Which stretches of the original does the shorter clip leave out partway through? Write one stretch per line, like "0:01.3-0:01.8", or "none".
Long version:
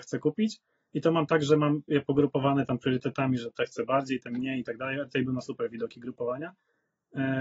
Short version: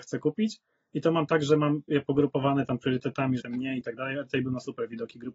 0:03.4-0:04.2